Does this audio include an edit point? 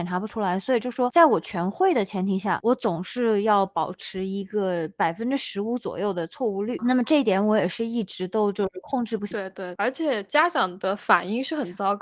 yes; 1 cut; at 9.3 s

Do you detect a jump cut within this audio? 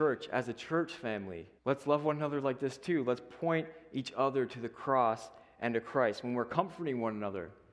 yes; 1 cut; at 1.6 s

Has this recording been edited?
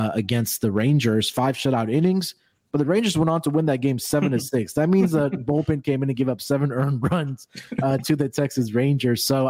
no; 0 cuts

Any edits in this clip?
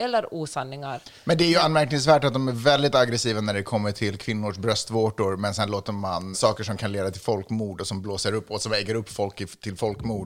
yes; 1 cut; at 6.3 s

